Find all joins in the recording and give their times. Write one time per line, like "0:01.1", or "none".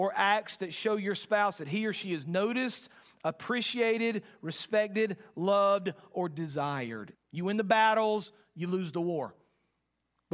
0:07.1